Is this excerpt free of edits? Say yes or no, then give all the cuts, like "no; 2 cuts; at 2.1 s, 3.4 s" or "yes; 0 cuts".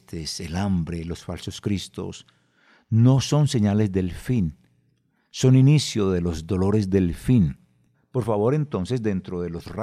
no; 1 cut; at 7.9 s